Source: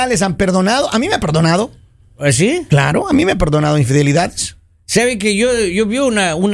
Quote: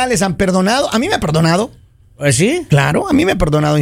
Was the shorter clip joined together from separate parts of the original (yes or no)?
no